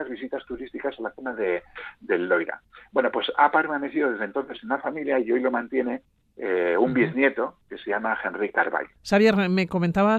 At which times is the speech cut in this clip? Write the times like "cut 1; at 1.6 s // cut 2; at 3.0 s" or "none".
none